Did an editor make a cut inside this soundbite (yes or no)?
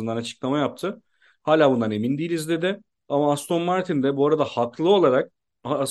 no